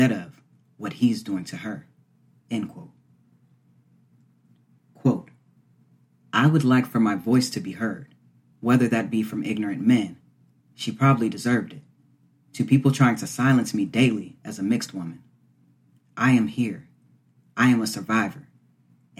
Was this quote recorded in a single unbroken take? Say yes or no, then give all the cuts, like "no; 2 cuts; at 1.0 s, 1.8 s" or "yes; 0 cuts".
no; 2 cuts; at 8.5 s, 10.6 s